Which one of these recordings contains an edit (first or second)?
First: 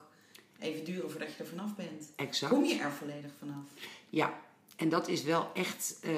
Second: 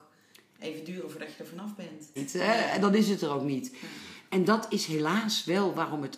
second